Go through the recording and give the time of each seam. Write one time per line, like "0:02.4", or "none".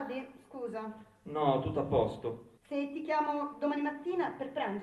0:02.6